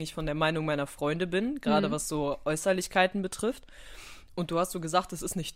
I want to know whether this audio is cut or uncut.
uncut